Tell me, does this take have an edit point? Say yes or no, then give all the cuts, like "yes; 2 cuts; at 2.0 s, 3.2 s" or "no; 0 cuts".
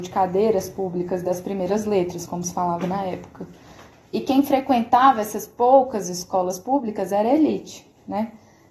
no; 0 cuts